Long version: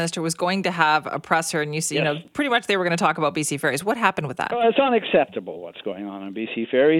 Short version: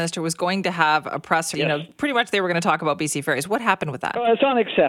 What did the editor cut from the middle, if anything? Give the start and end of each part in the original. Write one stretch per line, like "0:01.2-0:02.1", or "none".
0:01.5-0:01.9